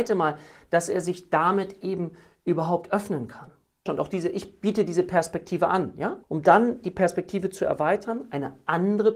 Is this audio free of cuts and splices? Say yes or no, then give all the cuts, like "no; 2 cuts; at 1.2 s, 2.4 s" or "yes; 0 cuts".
no; 2 cuts; at 3.9 s, 6.2 s